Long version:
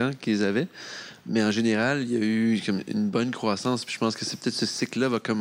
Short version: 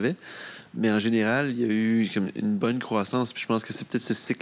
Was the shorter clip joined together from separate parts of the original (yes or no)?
no